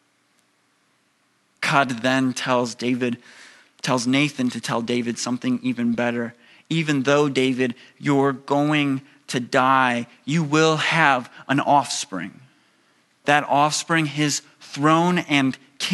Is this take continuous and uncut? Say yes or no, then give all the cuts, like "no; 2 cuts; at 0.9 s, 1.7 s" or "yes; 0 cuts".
no; 1 cut; at 13.2 s